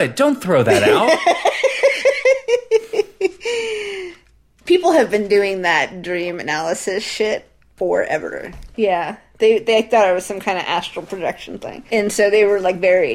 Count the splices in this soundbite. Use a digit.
2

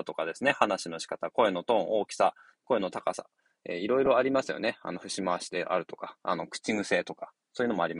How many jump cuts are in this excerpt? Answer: 0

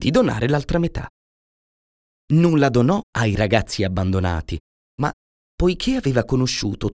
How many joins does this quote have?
2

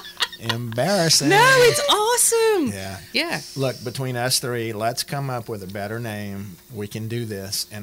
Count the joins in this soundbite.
1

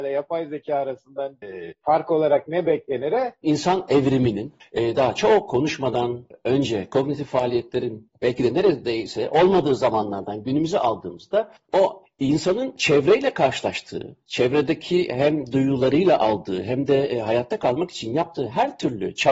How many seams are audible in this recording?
1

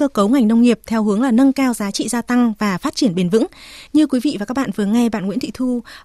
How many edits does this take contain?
0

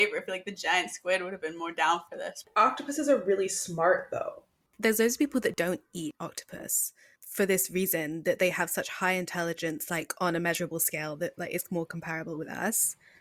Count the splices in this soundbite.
1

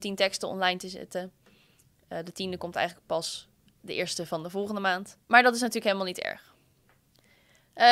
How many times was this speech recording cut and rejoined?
0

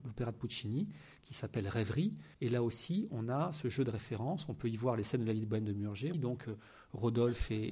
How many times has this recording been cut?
2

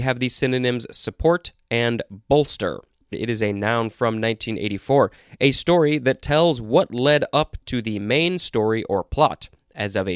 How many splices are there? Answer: 1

